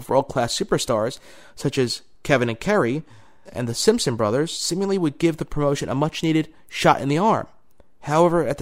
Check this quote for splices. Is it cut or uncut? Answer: cut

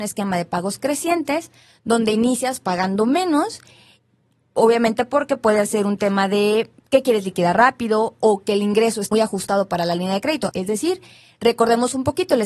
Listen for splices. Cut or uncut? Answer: cut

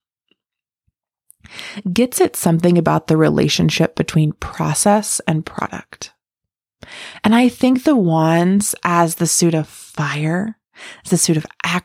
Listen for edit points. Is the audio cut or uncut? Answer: uncut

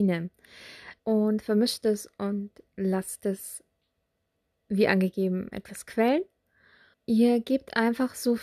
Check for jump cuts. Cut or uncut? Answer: cut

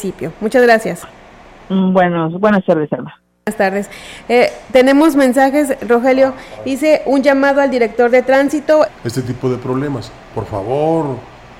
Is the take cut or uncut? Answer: cut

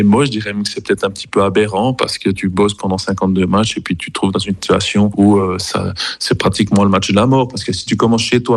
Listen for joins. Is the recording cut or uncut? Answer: uncut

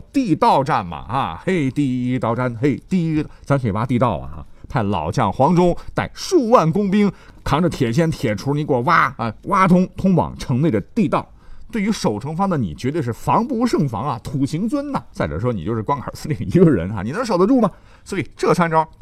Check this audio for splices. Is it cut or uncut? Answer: uncut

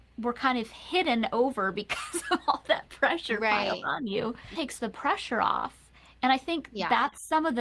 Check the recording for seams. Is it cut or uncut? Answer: cut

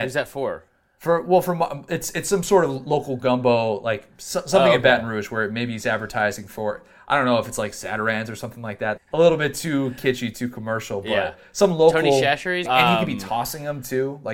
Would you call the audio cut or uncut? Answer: cut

